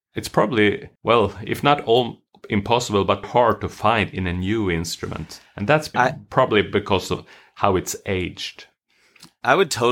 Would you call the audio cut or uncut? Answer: cut